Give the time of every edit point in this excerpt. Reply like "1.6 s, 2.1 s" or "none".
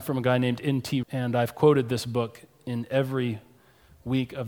1.0 s